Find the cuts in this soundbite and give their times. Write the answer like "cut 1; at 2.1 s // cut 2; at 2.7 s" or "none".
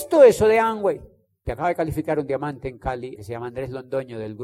cut 1; at 1.4 s // cut 2; at 3.1 s